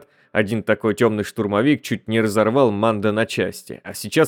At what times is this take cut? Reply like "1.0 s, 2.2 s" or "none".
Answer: none